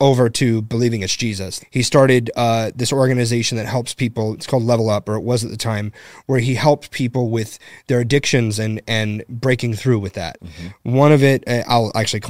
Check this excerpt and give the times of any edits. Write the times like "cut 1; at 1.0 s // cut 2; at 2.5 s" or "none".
cut 1; at 1.6 s // cut 2; at 10.4 s